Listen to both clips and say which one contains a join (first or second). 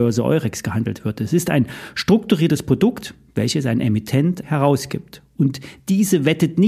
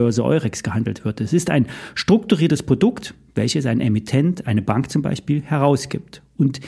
first